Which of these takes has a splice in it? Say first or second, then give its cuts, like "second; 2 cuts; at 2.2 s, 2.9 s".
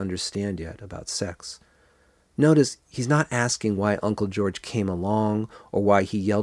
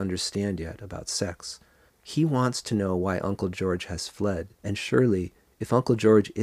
second; 2 cuts; at 1.9 s, 4.5 s